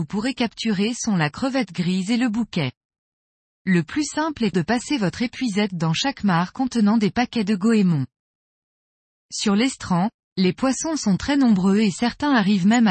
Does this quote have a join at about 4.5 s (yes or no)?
yes